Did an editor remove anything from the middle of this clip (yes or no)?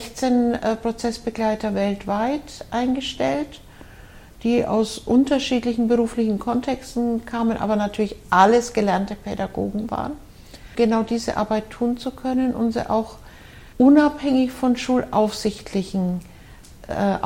yes